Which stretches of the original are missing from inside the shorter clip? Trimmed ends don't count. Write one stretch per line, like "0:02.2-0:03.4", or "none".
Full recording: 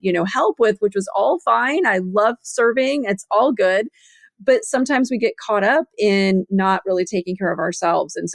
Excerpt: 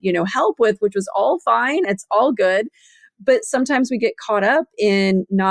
0:01.8-0:03.0